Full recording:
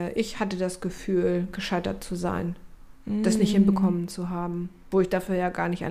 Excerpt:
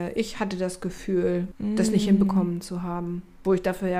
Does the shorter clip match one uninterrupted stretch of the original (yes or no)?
no